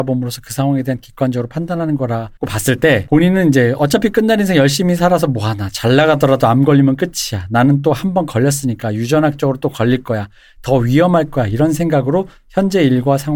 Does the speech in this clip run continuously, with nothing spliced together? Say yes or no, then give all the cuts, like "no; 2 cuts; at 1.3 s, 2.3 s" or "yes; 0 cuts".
no; 1 cut; at 2.4 s